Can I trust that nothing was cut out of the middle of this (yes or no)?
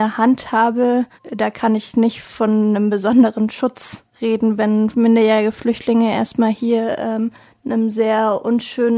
yes